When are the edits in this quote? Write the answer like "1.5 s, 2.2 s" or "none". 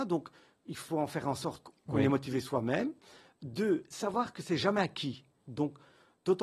5.4 s